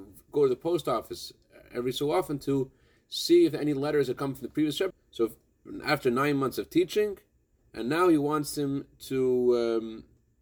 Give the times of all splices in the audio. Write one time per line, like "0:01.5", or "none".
0:04.9
0:07.6